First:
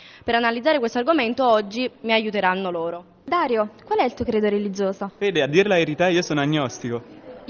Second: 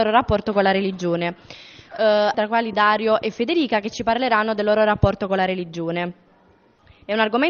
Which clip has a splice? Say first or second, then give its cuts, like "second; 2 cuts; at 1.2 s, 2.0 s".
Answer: second; 1 cut; at 2.3 s